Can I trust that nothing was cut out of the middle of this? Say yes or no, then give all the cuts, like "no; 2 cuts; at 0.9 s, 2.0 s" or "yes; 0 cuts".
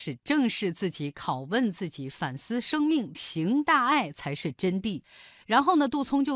no; 1 cut; at 3.1 s